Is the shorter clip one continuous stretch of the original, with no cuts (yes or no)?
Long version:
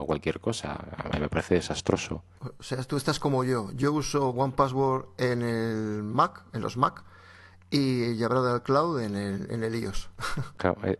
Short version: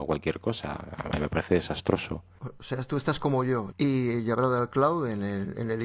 no